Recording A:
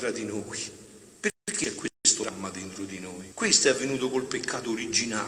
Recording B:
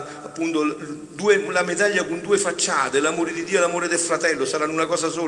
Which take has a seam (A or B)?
A